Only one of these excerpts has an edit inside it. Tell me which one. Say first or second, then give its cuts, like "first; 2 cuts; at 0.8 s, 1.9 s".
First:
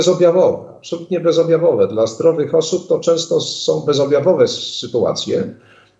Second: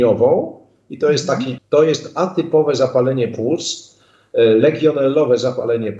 second; 1 cut; at 1.6 s